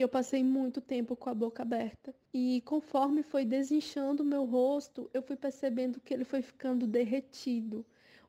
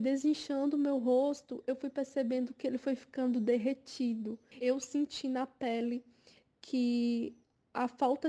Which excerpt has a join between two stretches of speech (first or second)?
second